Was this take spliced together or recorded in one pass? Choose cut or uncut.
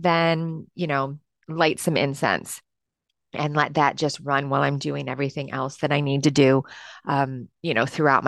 uncut